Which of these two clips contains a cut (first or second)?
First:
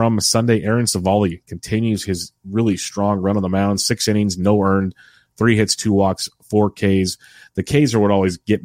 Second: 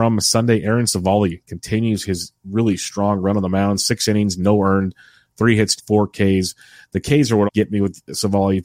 second